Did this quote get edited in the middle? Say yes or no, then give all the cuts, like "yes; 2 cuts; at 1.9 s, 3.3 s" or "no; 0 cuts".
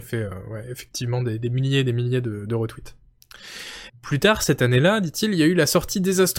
yes; 1 cut; at 3.9 s